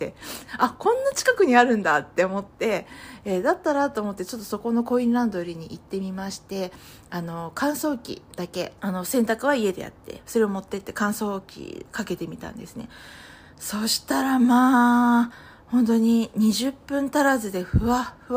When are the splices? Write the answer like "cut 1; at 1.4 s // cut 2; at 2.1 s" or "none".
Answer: cut 1; at 8.8 s